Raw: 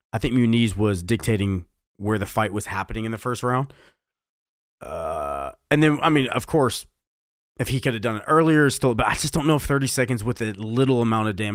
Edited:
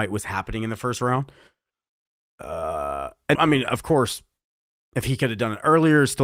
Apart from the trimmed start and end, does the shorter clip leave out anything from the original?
yes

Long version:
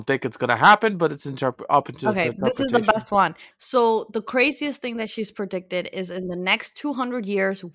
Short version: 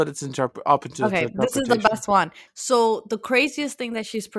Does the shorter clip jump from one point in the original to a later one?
no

